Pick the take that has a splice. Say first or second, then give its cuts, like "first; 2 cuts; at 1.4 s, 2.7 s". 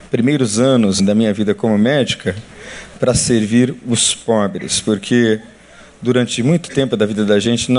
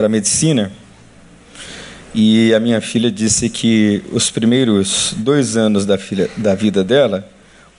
first; 1 cut; at 1.0 s